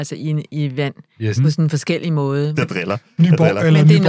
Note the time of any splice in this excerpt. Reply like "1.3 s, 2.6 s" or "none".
1.4 s, 2.5 s